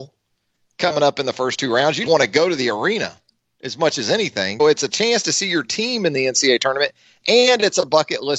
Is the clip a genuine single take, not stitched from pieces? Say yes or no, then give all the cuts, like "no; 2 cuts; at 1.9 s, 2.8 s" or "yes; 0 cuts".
no; 2 cuts; at 2.1 s, 4.6 s